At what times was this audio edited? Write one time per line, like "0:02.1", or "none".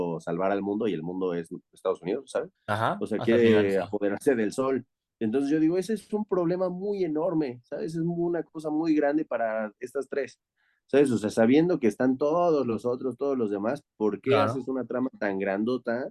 0:02.5